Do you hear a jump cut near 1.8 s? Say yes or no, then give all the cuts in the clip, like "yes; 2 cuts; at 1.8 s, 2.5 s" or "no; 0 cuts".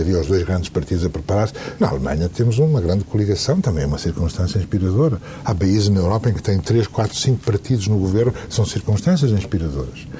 yes; 1 cut; at 1.8 s